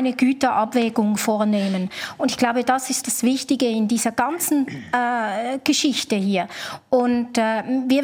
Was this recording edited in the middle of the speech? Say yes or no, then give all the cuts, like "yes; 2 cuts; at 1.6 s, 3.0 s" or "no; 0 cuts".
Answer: yes; 1 cut; at 3.0 s